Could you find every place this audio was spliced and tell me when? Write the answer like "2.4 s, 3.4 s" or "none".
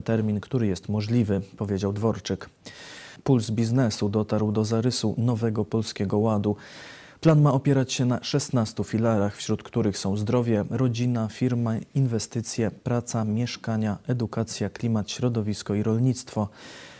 3.2 s